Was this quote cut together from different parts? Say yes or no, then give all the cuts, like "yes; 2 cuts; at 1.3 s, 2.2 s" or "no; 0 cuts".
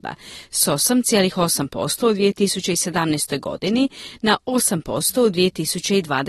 no; 0 cuts